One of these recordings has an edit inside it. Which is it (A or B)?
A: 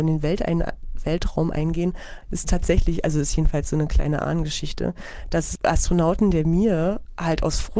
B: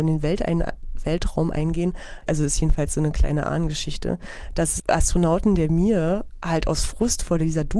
B